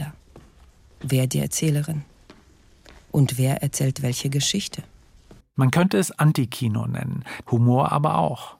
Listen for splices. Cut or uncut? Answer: cut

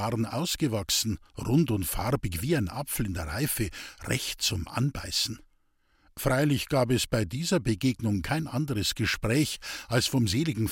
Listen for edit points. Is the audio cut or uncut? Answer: uncut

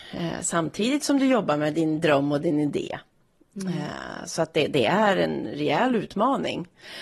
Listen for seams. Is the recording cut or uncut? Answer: uncut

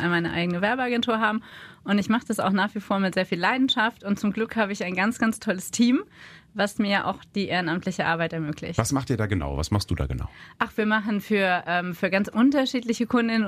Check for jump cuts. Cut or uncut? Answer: uncut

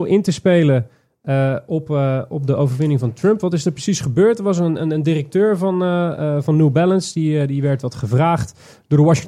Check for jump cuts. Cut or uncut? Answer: uncut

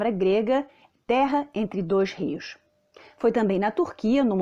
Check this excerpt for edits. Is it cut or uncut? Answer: uncut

